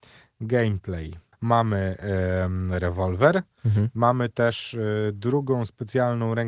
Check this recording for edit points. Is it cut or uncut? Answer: cut